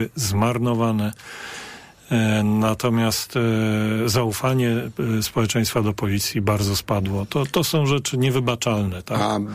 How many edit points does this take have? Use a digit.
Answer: 0